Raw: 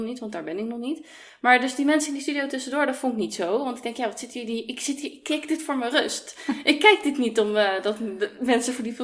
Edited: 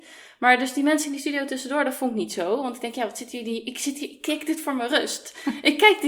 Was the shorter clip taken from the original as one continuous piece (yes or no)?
yes